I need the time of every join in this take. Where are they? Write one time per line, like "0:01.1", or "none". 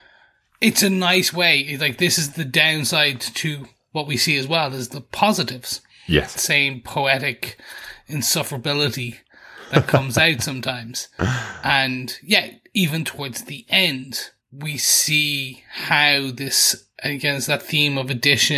0:06.3
0:14.4